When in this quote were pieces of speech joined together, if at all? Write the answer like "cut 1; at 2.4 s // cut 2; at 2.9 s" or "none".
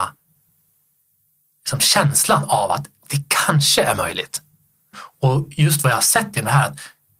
cut 1; at 4.9 s